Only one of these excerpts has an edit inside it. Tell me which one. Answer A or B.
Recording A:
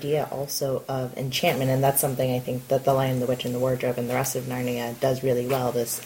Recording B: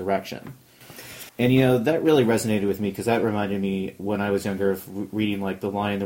B